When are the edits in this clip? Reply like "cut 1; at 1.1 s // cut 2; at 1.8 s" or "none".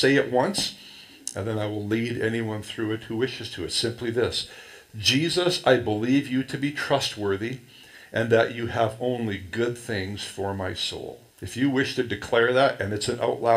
cut 1; at 11.3 s